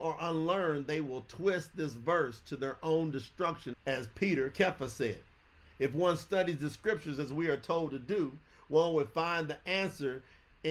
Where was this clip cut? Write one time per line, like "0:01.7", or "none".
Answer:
0:03.7

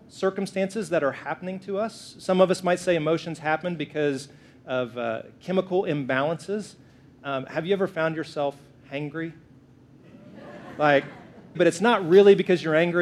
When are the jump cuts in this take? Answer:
0:11.5

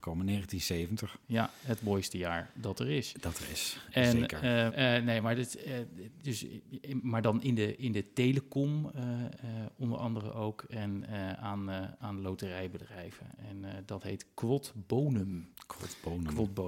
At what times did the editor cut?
0:04.7

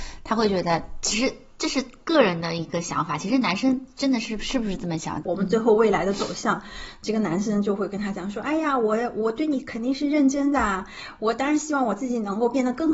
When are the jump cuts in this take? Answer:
0:05.2

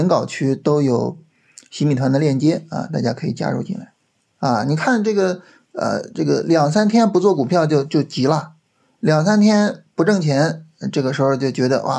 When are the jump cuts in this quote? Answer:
0:04.3
0:05.7

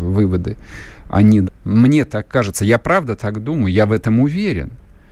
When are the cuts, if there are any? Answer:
0:01.4

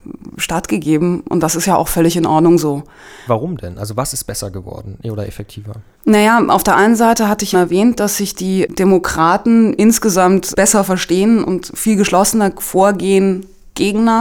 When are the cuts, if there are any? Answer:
0:03.3
0:07.5
0:10.5

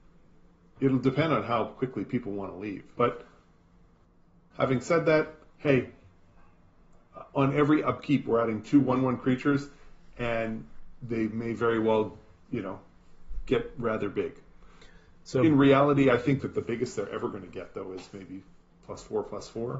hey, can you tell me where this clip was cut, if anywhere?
0:02.9

